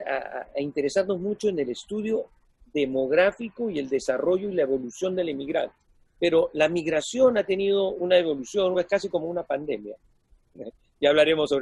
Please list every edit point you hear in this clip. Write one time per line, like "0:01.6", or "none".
0:06.0
0:08.7